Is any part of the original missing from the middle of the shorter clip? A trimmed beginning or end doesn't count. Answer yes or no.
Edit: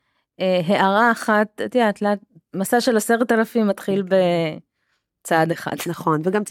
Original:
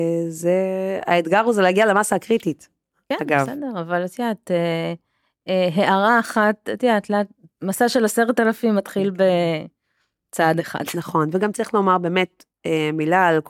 no